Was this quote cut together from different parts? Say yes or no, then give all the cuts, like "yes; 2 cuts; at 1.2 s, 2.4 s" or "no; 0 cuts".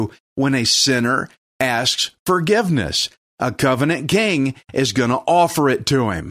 no; 0 cuts